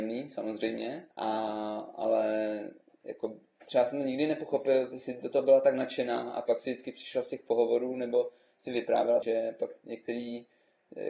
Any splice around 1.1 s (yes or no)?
yes